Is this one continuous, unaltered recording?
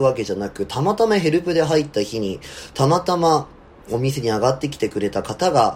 yes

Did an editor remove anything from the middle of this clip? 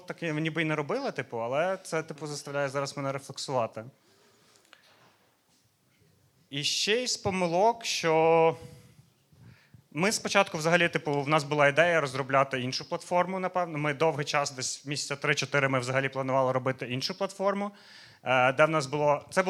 no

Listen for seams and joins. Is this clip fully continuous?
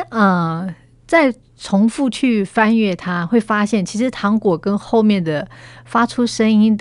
yes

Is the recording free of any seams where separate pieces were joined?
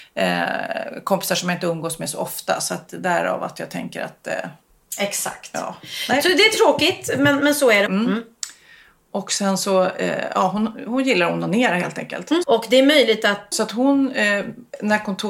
no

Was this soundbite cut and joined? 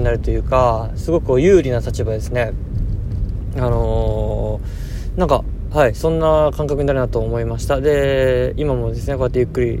no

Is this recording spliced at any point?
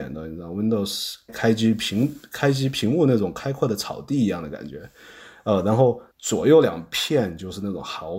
yes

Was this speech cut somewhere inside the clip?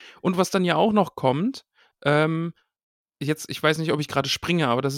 no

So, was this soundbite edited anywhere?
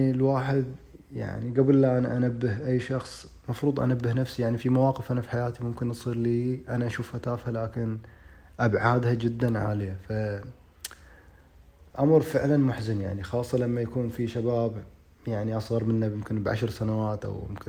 no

